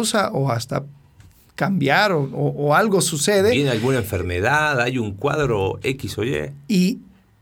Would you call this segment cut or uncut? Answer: uncut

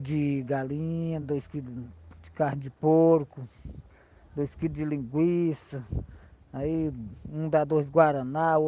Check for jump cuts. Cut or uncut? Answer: uncut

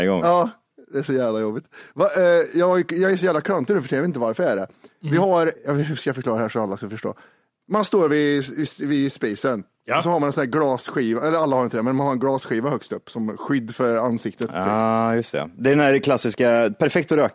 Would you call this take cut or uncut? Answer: cut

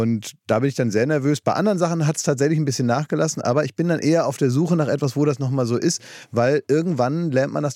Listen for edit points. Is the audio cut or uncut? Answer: uncut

